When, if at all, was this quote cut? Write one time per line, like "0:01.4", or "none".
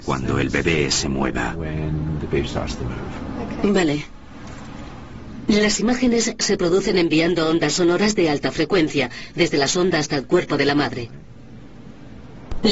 0:09.3